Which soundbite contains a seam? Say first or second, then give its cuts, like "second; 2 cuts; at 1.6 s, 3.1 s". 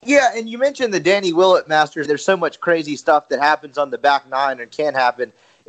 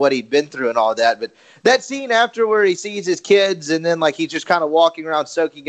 first; 1 cut; at 2.0 s